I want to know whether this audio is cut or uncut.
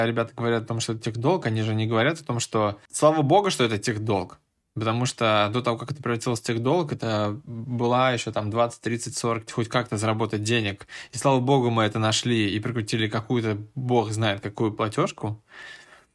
cut